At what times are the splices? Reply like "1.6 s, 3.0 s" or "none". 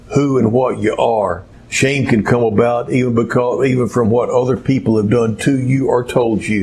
1.5 s